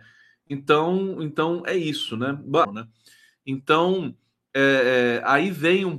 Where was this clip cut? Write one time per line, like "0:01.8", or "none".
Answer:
0:02.6